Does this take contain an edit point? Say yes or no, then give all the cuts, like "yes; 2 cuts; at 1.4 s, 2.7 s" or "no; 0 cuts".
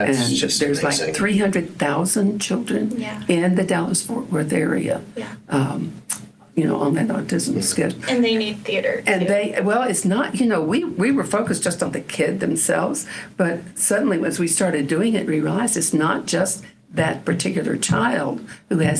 yes; 1 cut; at 8.0 s